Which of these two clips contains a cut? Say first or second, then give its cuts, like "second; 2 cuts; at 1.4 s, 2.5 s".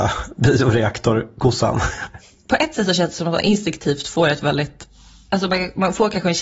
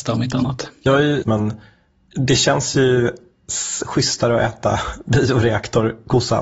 second; 1 cut; at 1.2 s